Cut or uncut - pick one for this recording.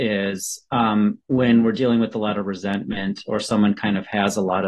uncut